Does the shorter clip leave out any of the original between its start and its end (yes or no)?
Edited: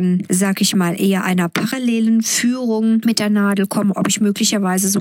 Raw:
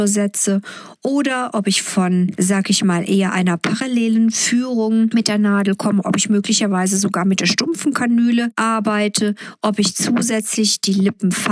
no